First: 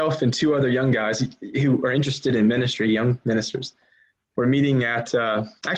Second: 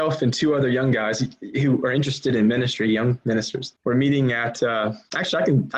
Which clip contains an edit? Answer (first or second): second